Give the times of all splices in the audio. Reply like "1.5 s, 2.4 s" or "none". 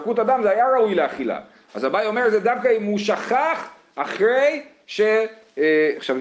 none